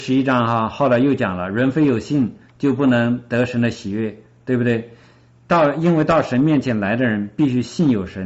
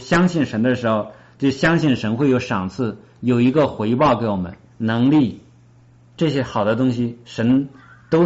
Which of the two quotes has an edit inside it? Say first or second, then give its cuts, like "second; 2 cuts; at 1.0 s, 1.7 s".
second; 1 cut; at 4.6 s